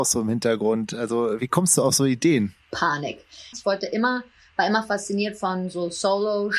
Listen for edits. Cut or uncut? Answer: cut